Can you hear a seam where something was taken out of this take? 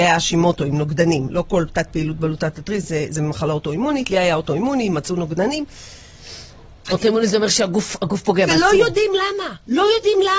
no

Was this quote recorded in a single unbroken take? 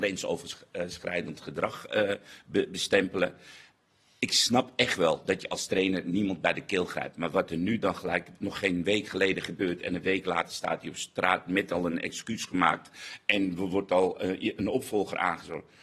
yes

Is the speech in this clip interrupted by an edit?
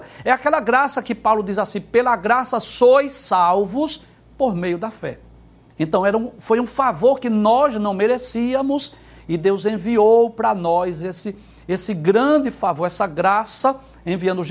no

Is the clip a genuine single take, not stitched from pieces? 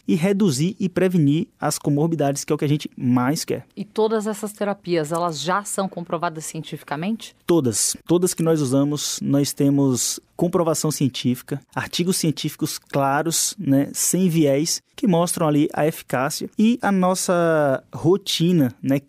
no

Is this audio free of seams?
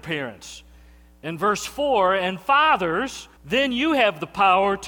no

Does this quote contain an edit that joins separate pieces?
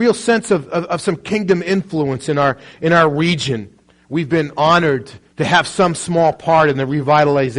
no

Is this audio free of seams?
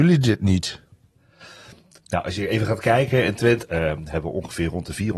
no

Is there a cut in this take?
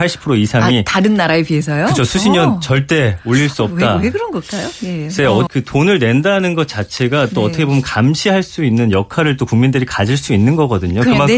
yes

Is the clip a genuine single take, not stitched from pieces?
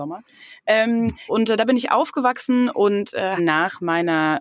no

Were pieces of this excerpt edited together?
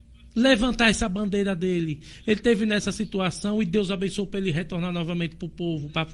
no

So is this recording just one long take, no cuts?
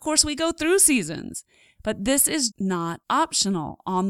no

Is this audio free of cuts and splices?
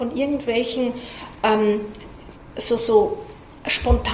yes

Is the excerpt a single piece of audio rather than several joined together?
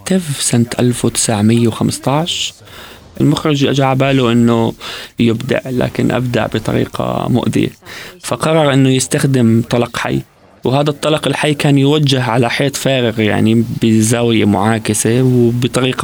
yes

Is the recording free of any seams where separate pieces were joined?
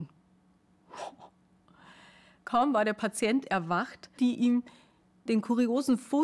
no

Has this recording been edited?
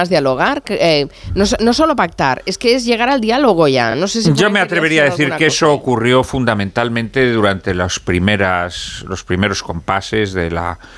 no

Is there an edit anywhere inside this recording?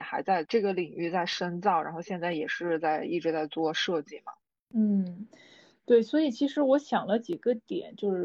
no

